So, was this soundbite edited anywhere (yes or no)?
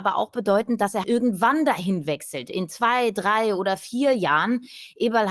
yes